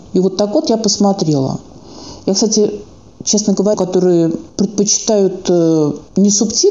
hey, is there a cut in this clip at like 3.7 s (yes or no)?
yes